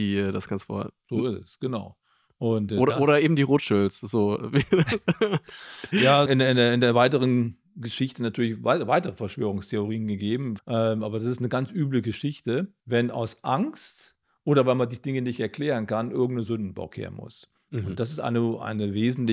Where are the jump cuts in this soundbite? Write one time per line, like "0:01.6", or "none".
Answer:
0:06.3
0:10.6
0:12.8

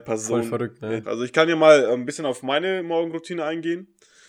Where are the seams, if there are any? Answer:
0:01.0

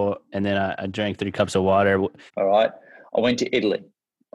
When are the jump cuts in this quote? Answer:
0:02.3

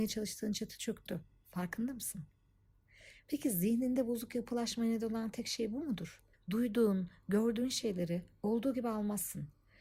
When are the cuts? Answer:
0:06.3

